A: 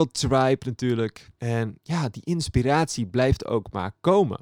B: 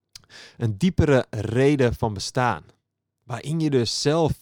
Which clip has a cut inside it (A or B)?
A